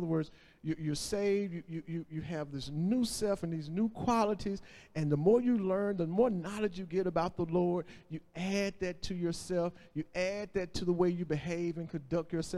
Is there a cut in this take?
no; 0 cuts

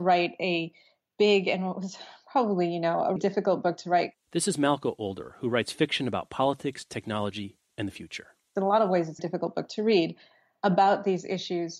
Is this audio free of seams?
no; 2 cuts; at 3.2 s, 9.2 s

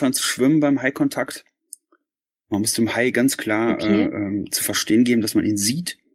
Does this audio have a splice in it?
no; 0 cuts

